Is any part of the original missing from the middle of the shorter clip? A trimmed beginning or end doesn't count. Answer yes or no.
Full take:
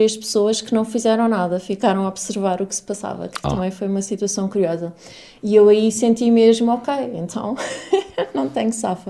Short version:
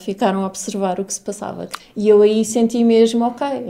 yes